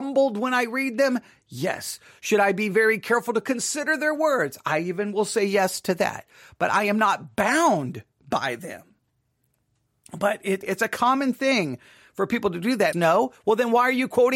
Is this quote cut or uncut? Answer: cut